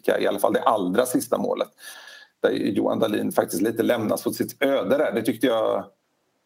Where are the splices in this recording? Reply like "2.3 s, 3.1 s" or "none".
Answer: none